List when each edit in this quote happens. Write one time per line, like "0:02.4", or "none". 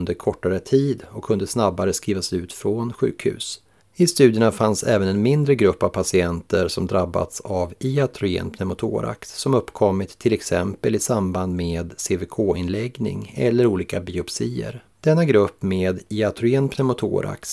0:03.8
0:14.9